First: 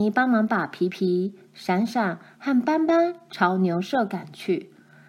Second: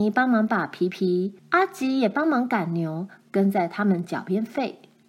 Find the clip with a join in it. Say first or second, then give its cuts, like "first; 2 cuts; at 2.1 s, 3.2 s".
second; 1 cut; at 1.4 s